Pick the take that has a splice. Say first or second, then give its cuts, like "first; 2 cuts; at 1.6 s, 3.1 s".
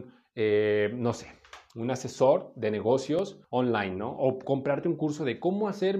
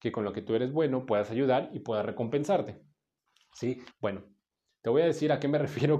second; 1 cut; at 3.9 s